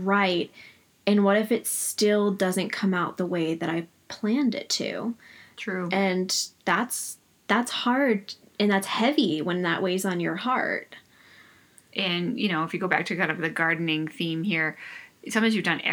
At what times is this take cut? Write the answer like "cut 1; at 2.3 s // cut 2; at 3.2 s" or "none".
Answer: none